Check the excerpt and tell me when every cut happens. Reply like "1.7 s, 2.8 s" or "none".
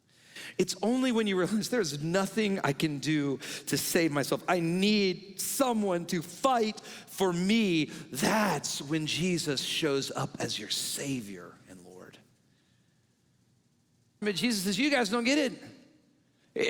14.2 s

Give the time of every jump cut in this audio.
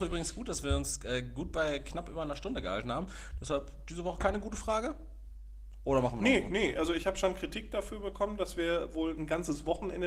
none

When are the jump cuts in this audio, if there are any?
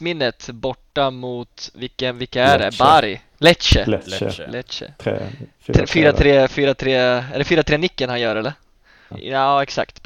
9.1 s

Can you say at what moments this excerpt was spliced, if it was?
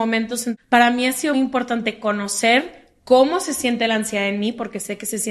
1.3 s

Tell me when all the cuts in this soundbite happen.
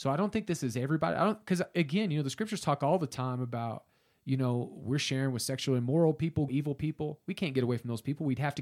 6.5 s

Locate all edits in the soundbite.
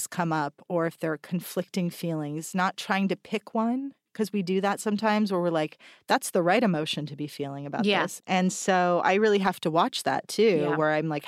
8.2 s

